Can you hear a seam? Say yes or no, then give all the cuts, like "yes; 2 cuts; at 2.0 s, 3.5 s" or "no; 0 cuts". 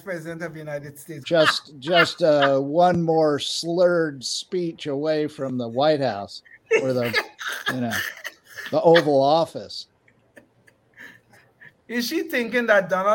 yes; 2 cuts; at 1.2 s, 11.7 s